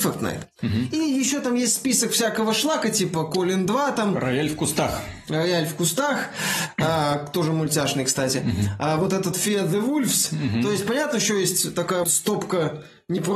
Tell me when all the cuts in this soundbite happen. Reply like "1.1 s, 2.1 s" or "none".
9.3 s, 12.0 s

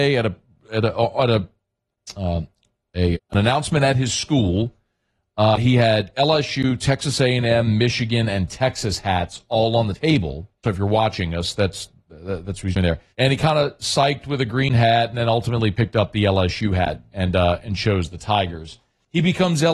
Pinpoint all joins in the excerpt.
3.1 s, 10.6 s, 13.1 s

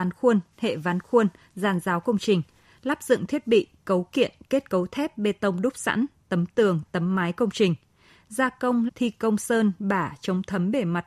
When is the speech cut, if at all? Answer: 6.8 s, 8.9 s

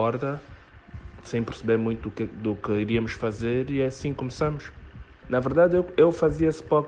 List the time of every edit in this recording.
5.2 s

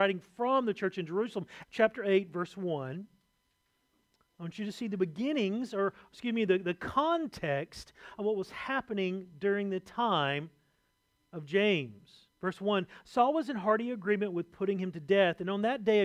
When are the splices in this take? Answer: 1.6 s, 12.3 s

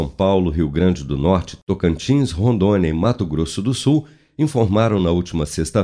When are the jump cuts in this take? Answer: none

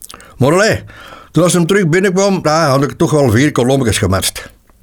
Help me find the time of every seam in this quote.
2.4 s

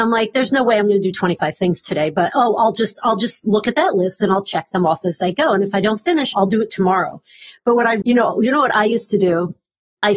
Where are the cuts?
6.3 s, 8.0 s

